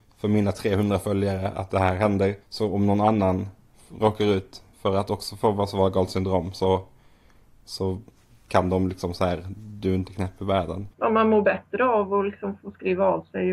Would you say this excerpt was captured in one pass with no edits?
no; 2 cuts; at 2.4 s, 10.9 s

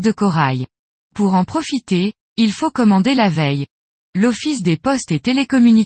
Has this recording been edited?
yes; 1 cut; at 0.9 s

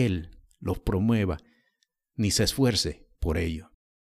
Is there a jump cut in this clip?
yes; 1 cut; at 3.1 s

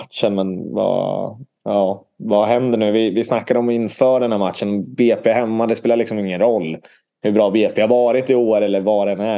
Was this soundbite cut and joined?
no; 0 cuts

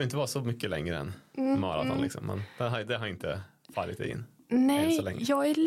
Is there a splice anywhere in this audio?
no; 0 cuts

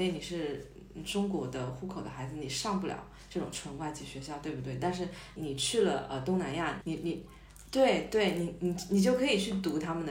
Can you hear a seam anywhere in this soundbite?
yes; 2 cuts; at 5.4 s, 6.8 s

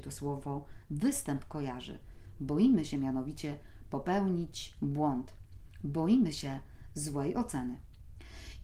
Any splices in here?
no; 0 cuts

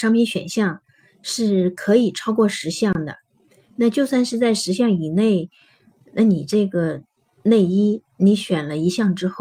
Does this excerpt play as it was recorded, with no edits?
yes; 0 cuts

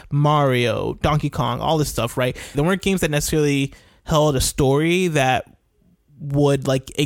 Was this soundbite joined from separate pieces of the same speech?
yes; 1 cut; at 2.5 s

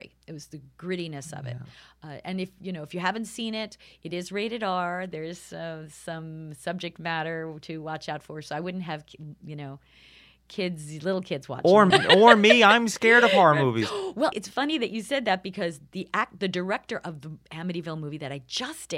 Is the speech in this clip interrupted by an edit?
yes; 2 cuts; at 11.9 s, 14.3 s

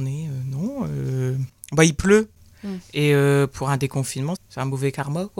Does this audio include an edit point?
yes; 1 cut; at 4.4 s

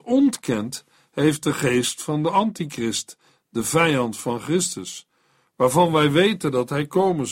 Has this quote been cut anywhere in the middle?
no; 0 cuts

